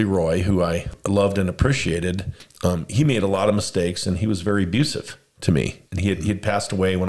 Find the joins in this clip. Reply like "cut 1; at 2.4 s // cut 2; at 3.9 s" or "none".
cut 1; at 5.9 s